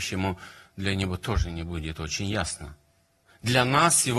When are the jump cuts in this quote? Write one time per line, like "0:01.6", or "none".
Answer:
none